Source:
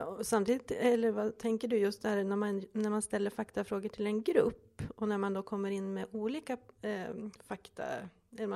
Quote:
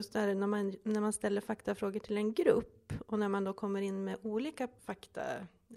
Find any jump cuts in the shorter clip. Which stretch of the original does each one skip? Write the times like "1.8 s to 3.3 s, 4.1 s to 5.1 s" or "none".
6.7 s to 7.4 s